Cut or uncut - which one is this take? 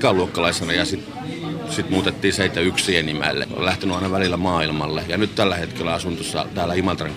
cut